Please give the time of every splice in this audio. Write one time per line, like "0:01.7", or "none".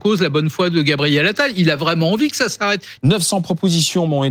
0:03.0